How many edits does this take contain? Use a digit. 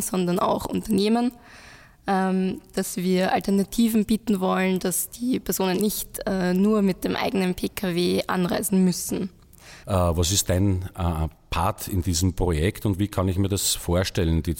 2